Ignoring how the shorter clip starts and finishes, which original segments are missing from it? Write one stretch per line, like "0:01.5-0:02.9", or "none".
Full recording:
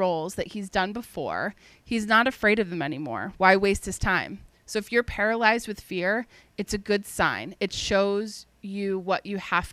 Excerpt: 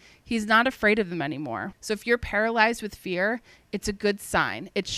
0:03.3-0:04.6